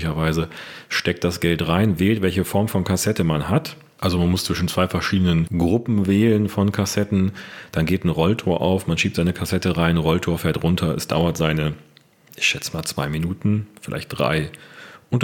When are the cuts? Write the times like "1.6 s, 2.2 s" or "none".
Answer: none